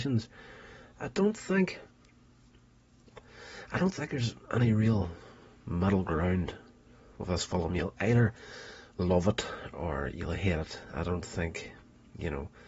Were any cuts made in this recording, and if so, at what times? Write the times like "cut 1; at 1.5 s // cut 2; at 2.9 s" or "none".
none